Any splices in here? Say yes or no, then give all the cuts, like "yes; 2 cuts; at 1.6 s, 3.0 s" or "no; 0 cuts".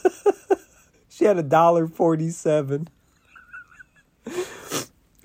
no; 0 cuts